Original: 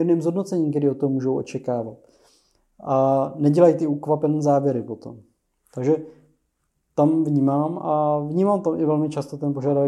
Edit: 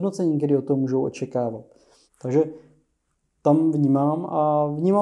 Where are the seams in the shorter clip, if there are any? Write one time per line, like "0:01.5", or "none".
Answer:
0:02.0

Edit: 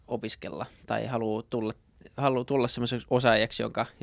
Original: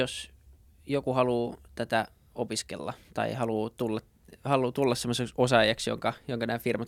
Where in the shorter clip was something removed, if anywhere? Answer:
none

